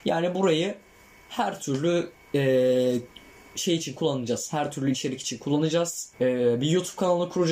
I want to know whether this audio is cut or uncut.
cut